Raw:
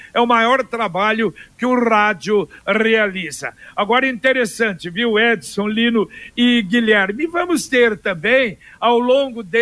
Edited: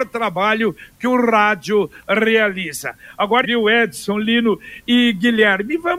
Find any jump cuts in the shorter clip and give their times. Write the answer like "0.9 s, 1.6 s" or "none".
3.4 s